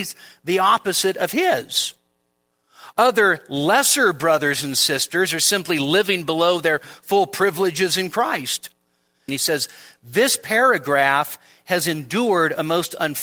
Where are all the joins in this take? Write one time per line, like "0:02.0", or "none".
0:02.9
0:09.3